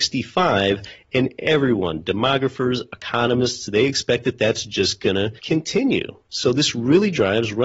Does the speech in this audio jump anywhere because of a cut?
yes; 1 cut; at 5.4 s

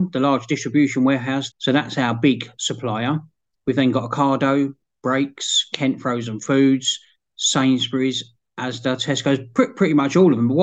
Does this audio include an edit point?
yes; 1 cut; at 1.5 s

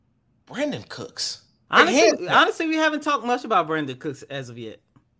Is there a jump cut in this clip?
yes; 1 cut; at 1.7 s

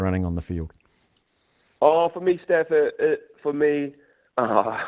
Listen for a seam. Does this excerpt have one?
no; 0 cuts

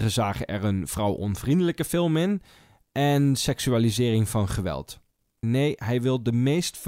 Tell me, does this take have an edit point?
yes; 1 cut; at 5.4 s

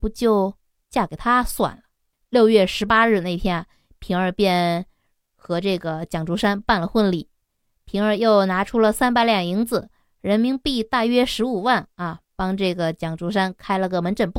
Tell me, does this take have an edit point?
yes; 1 cut; at 2.1 s

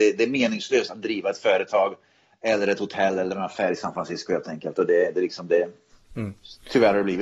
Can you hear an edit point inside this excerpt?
no; 0 cuts

